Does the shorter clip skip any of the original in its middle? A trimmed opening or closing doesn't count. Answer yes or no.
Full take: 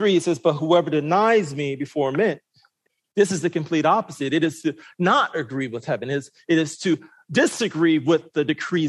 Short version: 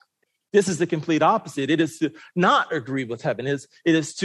no